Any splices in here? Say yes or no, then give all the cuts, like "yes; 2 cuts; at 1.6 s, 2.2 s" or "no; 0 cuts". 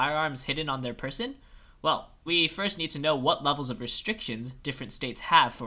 yes; 1 cut; at 2.3 s